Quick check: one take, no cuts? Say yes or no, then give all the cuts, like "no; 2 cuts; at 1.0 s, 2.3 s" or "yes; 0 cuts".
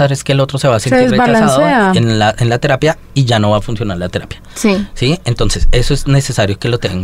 yes; 0 cuts